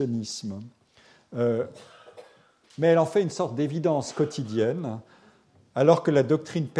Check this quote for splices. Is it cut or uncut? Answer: uncut